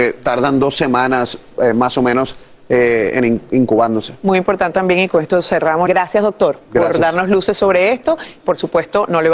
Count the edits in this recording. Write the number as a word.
two